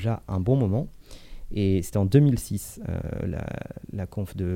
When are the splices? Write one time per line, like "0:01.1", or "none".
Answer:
none